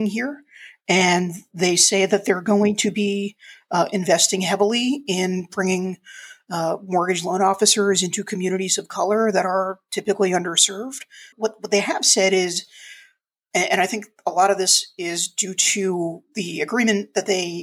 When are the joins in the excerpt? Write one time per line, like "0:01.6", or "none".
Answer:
0:11.3